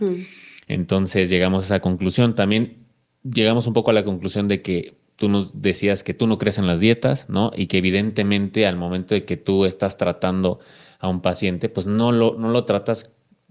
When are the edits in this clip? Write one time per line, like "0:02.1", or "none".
none